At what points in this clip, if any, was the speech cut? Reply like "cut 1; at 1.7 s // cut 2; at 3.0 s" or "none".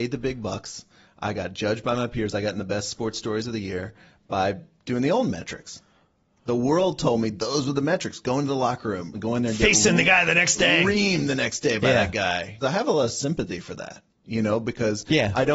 cut 1; at 9.1 s // cut 2; at 12.6 s